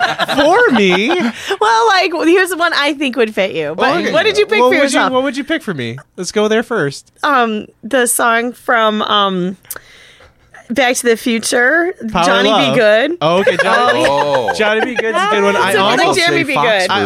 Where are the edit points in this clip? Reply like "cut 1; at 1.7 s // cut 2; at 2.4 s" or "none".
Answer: none